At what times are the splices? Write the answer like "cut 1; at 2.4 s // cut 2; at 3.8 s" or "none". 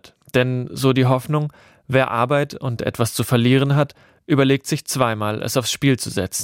none